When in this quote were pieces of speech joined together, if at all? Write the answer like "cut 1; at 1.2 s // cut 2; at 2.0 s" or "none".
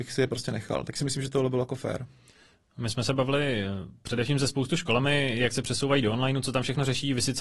none